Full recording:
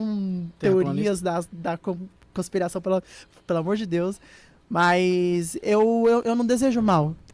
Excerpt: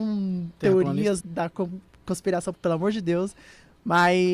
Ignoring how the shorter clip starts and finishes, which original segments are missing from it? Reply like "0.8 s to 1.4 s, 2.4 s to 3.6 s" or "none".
1.2 s to 1.5 s, 2.8 s to 3.4 s